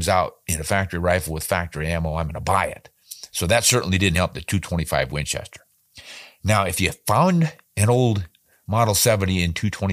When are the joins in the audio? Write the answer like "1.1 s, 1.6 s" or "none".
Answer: none